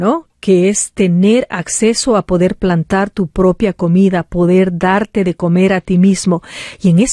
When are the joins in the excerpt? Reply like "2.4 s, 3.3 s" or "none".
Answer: none